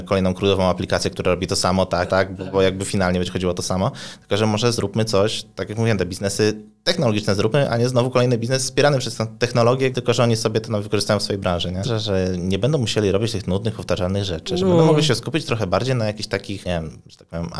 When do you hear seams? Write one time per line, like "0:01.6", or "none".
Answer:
0:02.1
0:09.9
0:11.8